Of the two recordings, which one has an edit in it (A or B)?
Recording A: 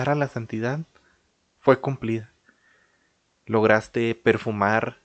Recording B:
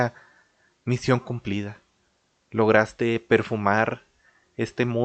A